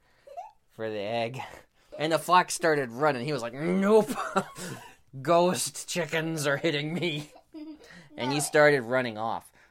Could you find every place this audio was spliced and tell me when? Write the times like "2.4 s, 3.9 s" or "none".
1.9 s